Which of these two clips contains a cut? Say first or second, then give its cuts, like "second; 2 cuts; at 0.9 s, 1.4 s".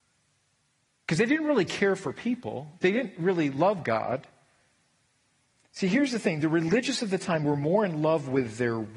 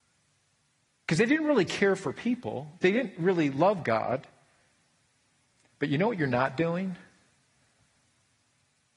second; 1 cut; at 5.7 s